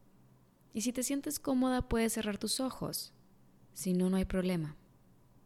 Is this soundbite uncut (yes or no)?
yes